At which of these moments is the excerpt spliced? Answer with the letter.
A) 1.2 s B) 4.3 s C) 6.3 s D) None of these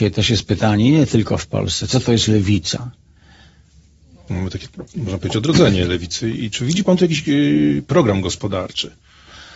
B